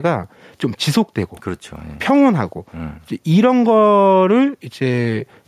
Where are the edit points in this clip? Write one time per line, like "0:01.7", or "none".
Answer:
none